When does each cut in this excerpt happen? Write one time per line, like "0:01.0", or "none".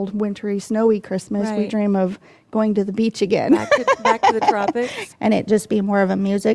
0:05.1